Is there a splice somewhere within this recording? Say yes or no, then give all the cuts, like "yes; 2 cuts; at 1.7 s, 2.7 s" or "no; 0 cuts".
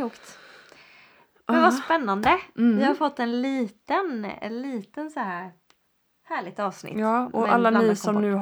no; 0 cuts